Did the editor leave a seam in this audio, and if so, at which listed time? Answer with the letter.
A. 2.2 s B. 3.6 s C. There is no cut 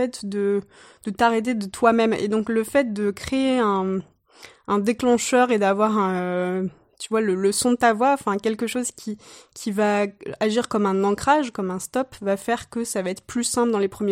C